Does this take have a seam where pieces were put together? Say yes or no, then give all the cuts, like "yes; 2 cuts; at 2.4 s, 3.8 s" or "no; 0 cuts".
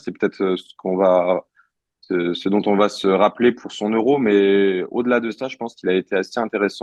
no; 0 cuts